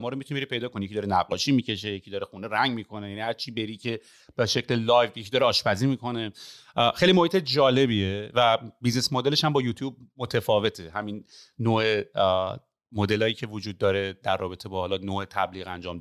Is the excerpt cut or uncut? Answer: uncut